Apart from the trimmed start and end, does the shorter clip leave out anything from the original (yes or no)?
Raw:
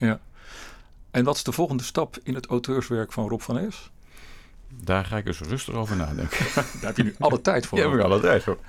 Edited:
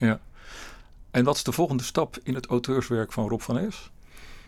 no